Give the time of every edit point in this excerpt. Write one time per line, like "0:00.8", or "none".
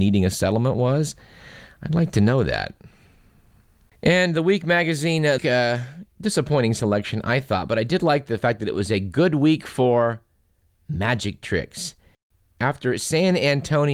0:05.4